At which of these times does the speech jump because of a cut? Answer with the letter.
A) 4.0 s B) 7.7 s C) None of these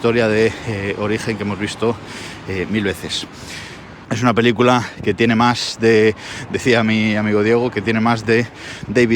A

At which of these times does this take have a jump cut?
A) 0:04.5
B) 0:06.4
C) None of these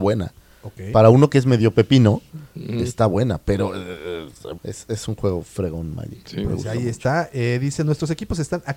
A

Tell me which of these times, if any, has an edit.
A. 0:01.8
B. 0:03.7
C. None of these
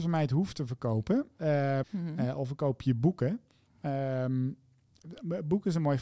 A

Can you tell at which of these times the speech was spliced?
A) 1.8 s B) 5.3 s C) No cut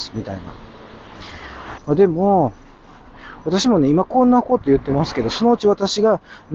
A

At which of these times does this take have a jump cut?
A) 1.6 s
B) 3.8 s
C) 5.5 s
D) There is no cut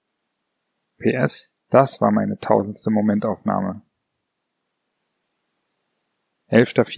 A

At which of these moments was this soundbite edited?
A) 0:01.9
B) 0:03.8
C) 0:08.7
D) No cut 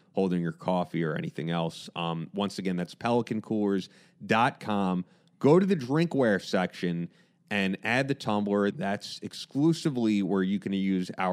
C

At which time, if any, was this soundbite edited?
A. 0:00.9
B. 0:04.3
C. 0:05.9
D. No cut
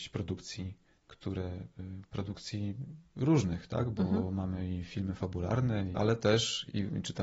C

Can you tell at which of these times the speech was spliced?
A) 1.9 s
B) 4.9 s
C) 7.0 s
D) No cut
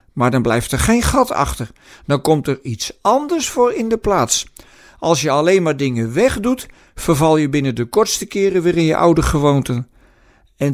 D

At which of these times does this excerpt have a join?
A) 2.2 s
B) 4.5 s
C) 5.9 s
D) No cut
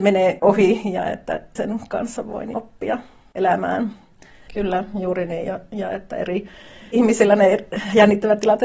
B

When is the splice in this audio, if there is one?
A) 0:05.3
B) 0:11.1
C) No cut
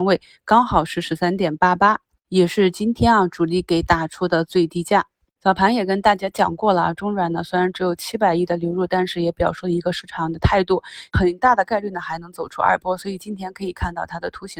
B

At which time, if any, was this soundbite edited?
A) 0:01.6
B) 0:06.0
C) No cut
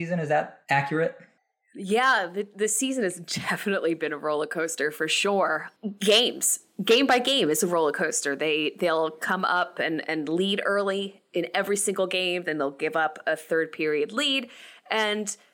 C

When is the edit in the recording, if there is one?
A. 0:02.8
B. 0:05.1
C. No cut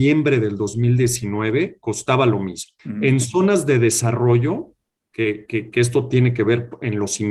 A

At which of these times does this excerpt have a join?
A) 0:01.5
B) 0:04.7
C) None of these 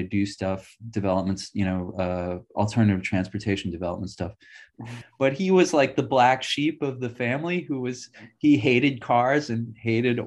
B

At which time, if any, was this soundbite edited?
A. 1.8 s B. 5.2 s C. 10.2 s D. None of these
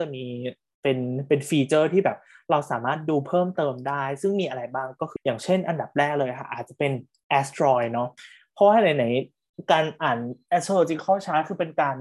B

